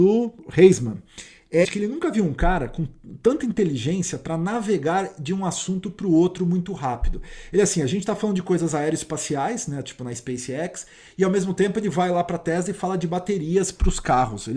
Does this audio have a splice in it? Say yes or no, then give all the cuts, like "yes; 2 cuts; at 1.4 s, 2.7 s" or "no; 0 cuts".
yes; 1 cut; at 1.6 s